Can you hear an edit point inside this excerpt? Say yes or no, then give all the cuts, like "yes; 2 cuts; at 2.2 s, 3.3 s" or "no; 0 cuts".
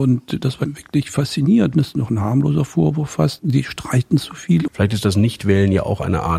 yes; 3 cuts; at 1.7 s, 3.4 s, 4.7 s